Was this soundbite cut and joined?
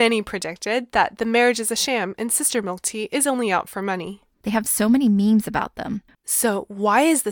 yes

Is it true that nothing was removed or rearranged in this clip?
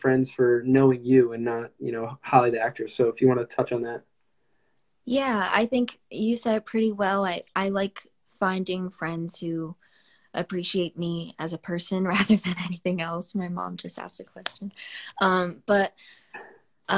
yes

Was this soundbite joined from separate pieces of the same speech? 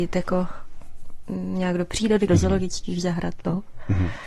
yes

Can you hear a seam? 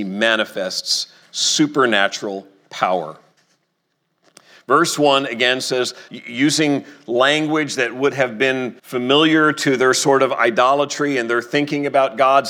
yes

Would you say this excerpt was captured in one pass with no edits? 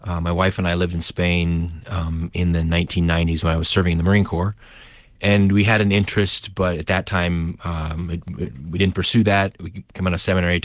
yes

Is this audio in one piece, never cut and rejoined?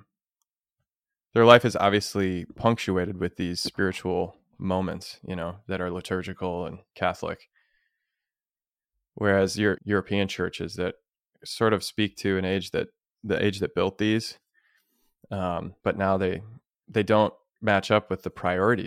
no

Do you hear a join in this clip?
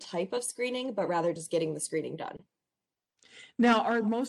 no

